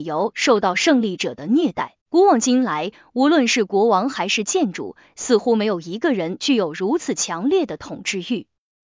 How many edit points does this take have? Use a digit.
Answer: 1